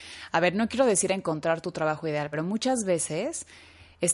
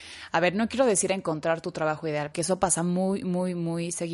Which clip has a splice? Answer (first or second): second